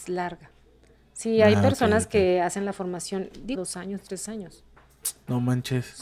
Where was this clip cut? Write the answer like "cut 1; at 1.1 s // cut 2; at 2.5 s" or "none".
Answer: cut 1; at 3.5 s